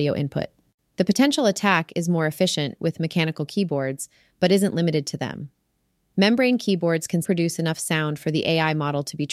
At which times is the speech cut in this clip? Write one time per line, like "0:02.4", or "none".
0:07.2